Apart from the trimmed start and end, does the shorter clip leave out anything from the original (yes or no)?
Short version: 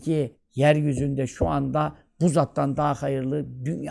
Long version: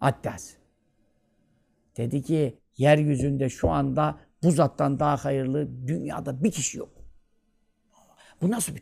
no